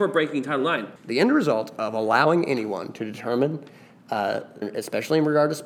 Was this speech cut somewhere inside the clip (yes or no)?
yes